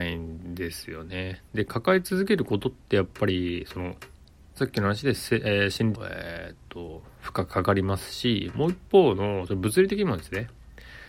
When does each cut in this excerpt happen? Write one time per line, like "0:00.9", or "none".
0:05.9